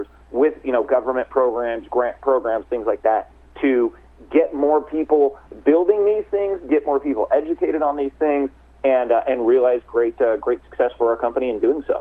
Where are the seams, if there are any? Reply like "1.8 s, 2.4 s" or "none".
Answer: none